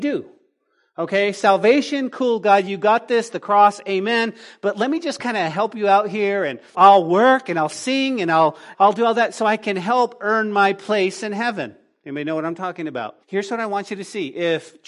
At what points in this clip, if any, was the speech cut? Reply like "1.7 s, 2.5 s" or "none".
6.7 s, 8.7 s, 13.2 s